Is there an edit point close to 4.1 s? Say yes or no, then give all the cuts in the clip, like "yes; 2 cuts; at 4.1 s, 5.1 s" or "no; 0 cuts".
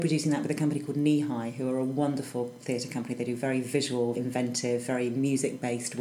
yes; 1 cut; at 4.1 s